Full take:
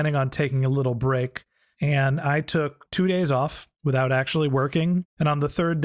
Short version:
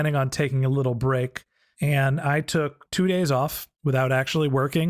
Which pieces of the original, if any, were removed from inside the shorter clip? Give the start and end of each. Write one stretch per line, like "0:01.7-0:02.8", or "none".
none